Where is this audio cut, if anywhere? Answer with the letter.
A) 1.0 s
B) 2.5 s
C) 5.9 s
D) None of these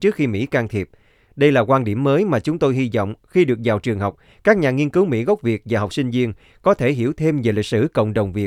C